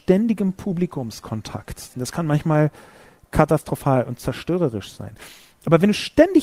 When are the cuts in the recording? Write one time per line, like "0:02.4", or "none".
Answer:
0:01.9